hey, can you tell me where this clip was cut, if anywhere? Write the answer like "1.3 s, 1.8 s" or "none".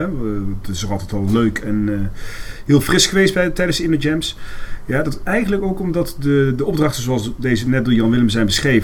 none